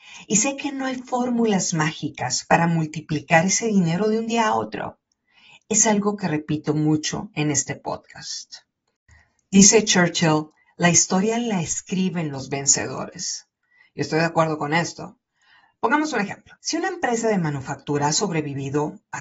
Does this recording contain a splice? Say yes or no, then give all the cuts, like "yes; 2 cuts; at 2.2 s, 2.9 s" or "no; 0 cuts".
yes; 1 cut; at 16.6 s